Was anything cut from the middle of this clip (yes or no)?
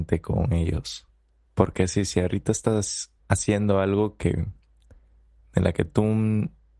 yes